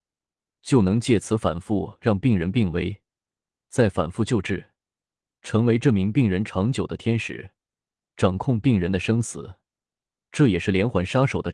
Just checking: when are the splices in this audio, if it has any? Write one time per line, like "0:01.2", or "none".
none